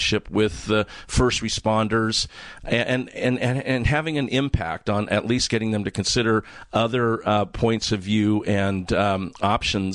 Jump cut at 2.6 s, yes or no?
yes